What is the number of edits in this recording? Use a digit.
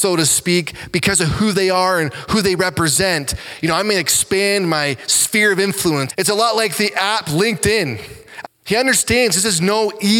2